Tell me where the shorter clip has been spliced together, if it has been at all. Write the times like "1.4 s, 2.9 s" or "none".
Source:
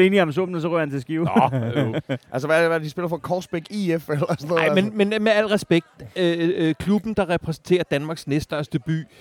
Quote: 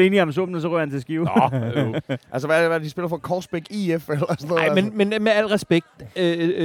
none